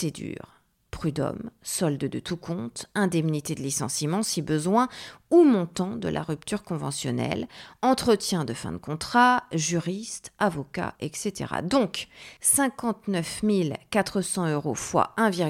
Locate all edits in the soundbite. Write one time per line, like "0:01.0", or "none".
0:11.0
0:12.4